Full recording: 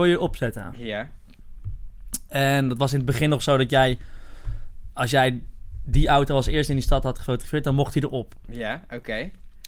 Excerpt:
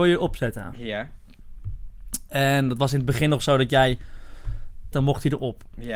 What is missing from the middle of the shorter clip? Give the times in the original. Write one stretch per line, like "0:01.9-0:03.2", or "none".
0:04.9-0:07.6